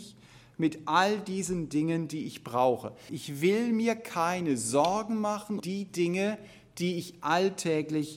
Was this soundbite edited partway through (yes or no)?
yes